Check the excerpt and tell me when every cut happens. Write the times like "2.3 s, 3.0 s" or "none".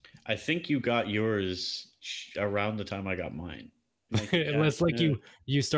4.1 s